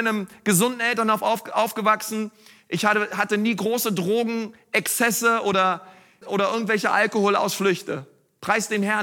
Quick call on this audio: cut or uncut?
cut